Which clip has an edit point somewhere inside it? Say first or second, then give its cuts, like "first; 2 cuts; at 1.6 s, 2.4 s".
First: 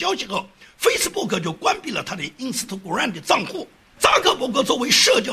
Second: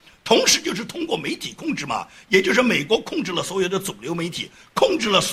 first; 1 cut; at 4.0 s